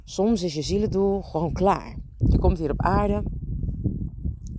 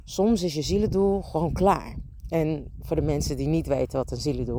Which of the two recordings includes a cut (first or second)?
first